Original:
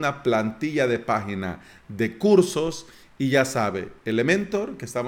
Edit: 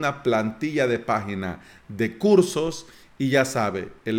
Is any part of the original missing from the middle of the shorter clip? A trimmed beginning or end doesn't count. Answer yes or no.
no